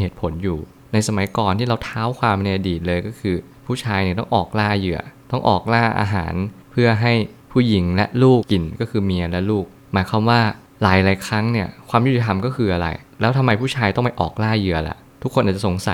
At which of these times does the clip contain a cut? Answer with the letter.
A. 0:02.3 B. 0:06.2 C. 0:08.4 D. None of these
C